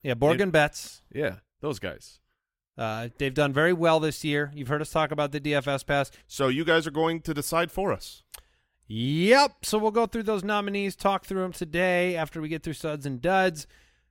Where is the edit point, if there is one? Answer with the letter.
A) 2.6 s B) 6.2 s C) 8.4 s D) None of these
B